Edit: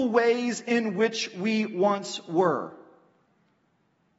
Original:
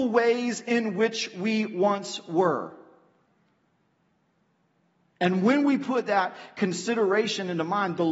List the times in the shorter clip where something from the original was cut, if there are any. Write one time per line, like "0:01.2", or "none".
none